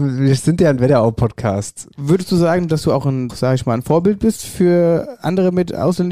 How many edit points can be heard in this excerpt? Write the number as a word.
two